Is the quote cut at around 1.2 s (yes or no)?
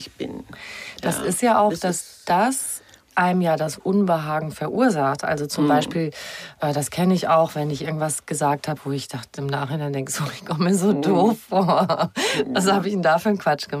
no